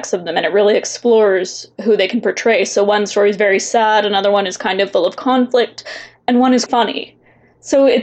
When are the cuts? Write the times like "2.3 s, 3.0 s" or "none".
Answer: 6.7 s